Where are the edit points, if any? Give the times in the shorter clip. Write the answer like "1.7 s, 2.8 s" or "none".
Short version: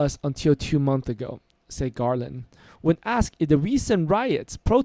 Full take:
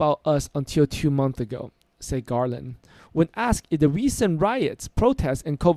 none